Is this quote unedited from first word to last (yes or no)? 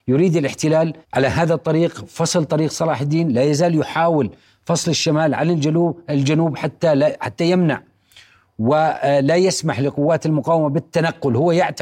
no